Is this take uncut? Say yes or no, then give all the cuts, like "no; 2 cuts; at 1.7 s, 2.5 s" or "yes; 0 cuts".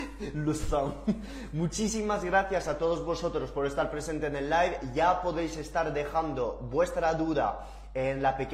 yes; 0 cuts